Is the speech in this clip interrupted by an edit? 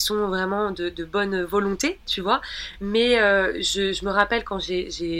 no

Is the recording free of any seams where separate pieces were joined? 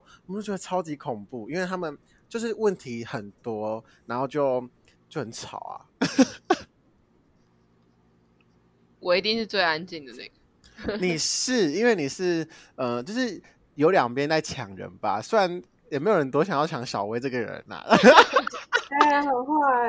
no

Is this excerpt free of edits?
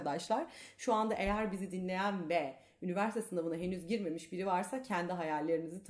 yes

